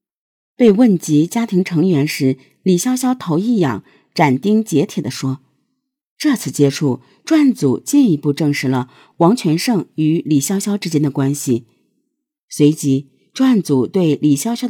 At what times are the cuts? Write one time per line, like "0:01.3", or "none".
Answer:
none